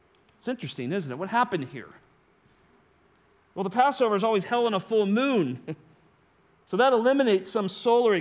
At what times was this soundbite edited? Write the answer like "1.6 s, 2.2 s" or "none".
none